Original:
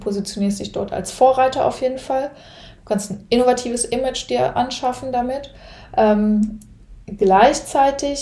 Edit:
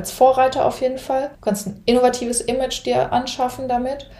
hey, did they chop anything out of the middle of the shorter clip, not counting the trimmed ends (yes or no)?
yes